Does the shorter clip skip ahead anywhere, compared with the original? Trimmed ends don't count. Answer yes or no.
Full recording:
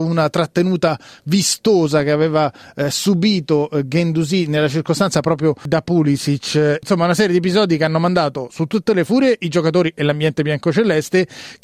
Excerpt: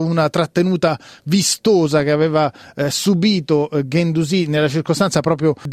no